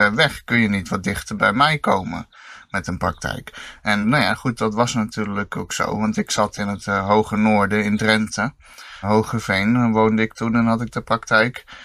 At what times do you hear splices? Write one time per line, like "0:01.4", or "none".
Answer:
0:04.0
0:09.0

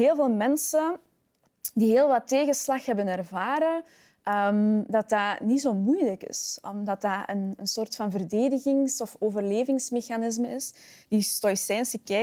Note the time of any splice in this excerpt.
none

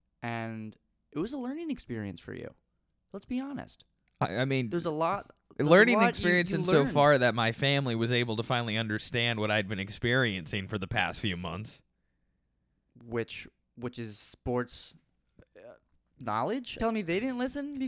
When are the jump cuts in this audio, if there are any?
0:16.8

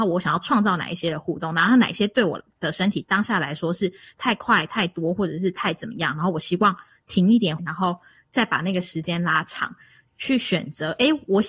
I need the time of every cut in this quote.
0:07.6
0:10.1

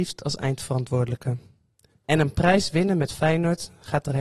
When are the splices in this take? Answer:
0:02.0

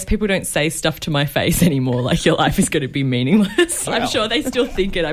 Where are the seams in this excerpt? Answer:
0:03.9

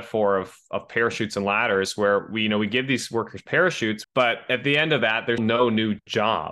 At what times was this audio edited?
0:04.0
0:05.4

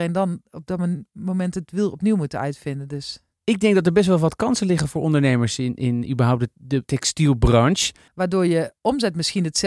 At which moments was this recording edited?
0:06.8
0:08.1

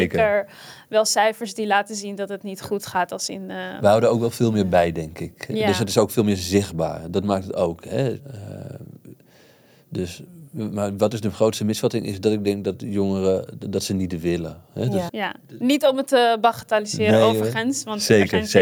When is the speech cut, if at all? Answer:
0:08.2
0:15.1

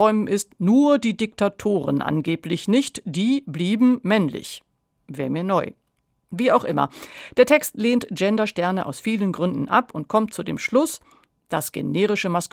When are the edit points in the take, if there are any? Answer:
none

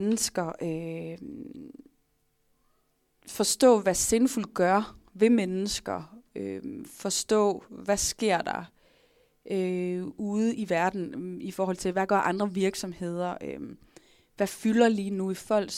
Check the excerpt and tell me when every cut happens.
none

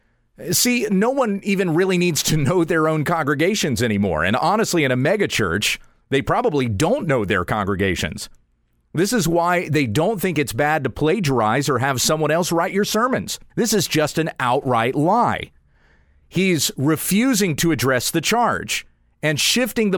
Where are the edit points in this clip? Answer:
0:13.5

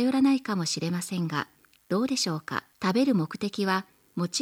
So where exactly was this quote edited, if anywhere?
0:02.7

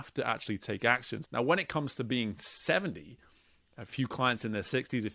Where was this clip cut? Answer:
0:01.2

